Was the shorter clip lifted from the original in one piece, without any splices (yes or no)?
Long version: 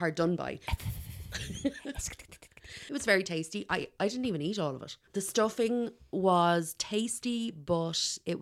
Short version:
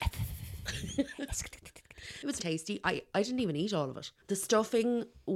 no